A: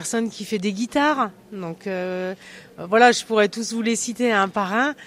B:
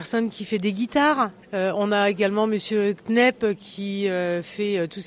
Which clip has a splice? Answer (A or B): B